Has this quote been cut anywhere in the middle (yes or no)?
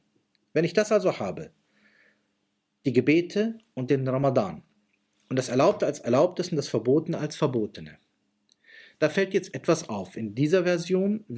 no